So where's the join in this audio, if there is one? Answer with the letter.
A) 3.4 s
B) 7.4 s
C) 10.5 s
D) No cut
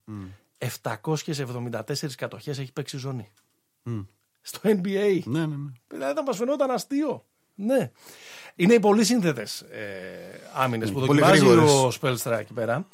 D